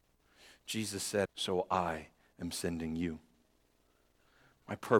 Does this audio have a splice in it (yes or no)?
yes